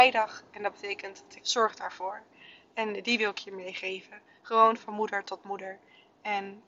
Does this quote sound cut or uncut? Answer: cut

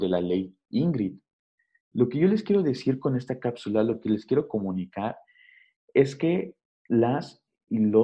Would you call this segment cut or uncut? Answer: uncut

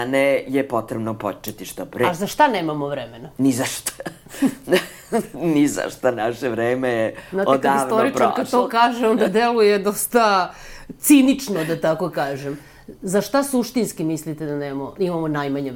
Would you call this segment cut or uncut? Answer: uncut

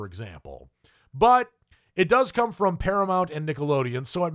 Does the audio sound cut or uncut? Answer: uncut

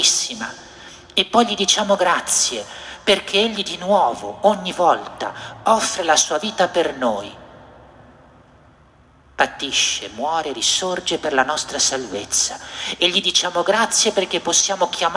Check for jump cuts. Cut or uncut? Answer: uncut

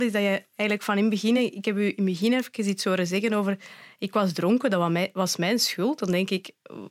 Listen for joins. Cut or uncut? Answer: uncut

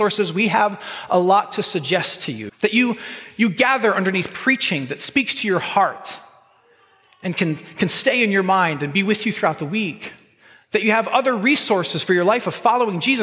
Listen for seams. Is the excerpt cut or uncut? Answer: cut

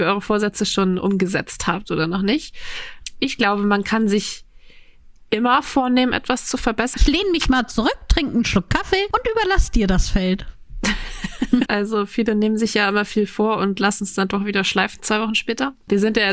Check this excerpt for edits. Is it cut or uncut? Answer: cut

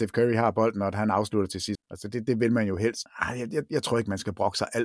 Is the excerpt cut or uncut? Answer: cut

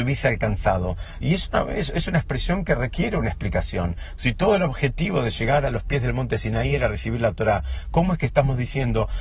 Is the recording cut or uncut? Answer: cut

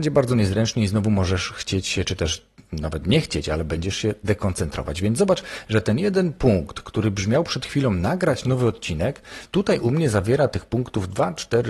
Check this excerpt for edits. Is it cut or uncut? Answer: uncut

